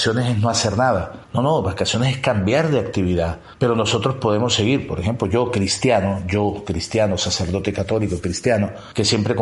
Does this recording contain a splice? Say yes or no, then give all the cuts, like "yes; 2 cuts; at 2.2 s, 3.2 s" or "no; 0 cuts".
no; 0 cuts